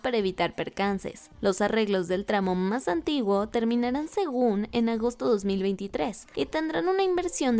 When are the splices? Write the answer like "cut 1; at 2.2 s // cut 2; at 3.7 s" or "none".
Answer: none